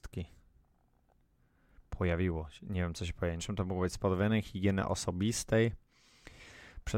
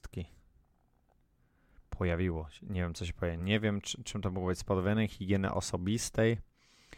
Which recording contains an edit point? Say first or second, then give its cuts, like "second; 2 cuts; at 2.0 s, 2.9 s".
first; 1 cut; at 3.4 s